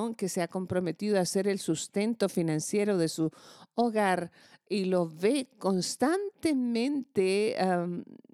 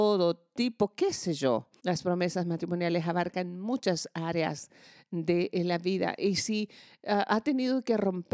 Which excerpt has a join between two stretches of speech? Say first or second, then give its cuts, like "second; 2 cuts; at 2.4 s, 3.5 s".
second; 1 cut; at 1.8 s